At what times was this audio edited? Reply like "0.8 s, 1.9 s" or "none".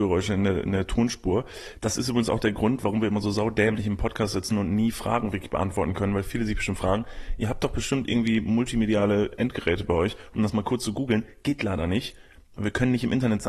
none